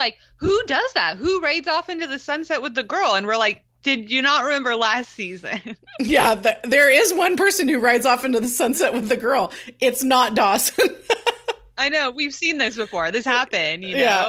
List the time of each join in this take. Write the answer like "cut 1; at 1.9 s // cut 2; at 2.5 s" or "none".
none